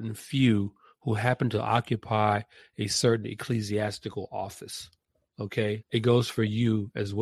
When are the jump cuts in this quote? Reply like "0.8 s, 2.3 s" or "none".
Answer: 5.8 s